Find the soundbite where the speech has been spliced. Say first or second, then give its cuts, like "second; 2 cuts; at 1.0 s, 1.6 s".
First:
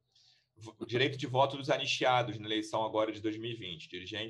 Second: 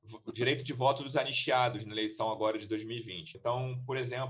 second; 1 cut; at 3.3 s